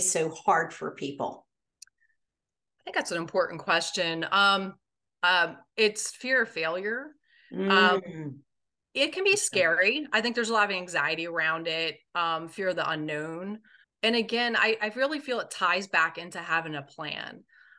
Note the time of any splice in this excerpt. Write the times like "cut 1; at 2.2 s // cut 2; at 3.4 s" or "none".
cut 1; at 5.1 s // cut 2; at 13.8 s